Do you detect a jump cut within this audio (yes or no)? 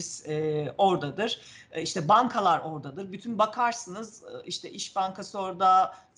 no